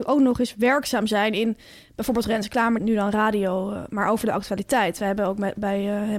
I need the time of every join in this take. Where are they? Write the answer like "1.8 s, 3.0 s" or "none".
2.8 s